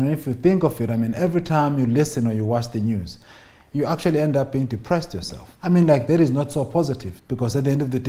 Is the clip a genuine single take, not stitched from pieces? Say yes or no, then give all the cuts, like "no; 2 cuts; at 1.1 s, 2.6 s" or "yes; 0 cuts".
no; 2 cuts; at 5.6 s, 7.2 s